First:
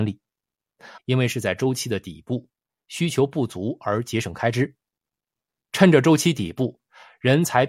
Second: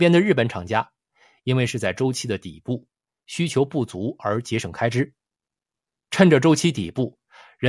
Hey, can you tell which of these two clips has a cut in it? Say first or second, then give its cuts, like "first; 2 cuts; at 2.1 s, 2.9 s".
first; 1 cut; at 1.0 s